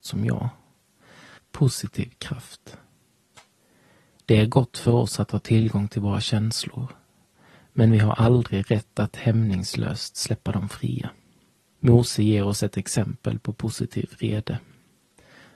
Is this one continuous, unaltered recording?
no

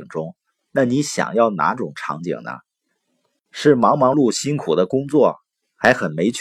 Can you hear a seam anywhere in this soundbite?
yes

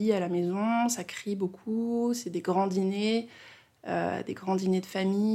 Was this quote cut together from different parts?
no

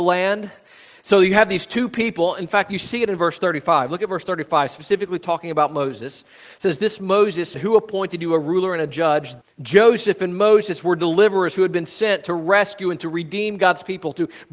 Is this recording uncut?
no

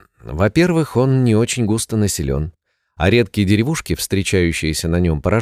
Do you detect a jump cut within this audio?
no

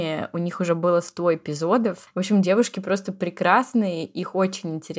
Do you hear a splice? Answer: yes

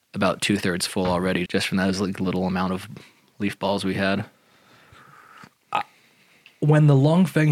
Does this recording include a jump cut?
yes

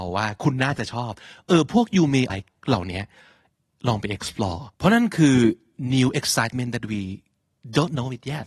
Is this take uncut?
no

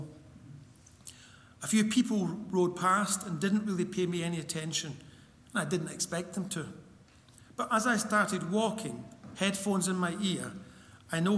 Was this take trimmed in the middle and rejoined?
no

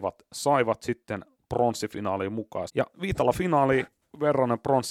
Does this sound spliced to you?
yes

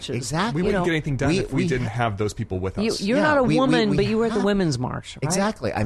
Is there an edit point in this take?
no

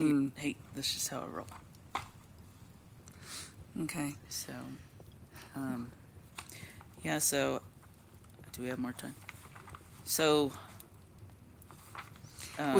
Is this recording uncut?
no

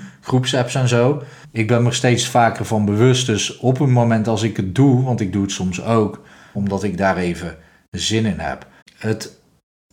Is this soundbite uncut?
no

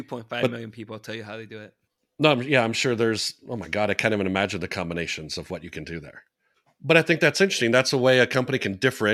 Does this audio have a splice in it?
no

